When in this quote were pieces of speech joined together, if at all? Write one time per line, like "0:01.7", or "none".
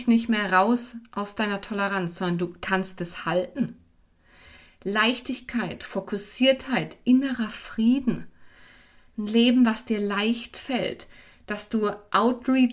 none